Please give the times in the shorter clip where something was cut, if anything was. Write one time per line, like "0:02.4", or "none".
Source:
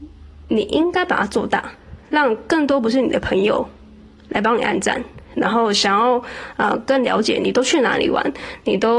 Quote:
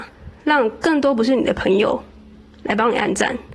none

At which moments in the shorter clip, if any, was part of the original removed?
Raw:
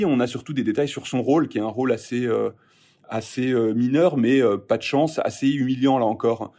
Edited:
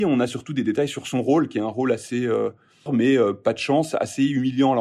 0:02.9

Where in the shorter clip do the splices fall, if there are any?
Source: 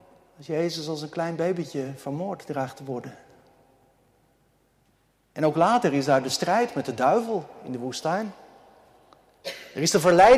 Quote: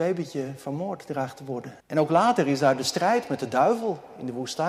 0:01.8

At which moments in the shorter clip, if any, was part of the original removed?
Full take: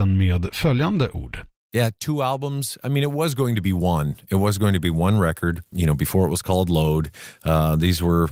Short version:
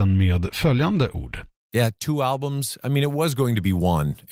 none

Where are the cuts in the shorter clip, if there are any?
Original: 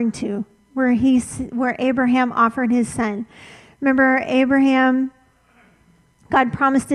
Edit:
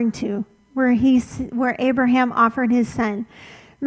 none

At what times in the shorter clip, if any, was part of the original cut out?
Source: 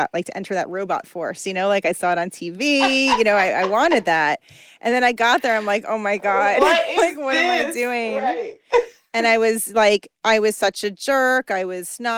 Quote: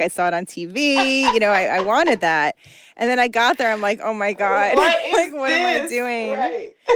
none

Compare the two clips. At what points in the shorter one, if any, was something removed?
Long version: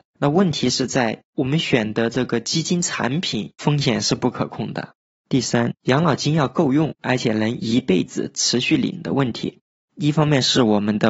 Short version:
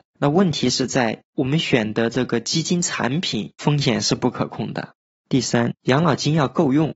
none

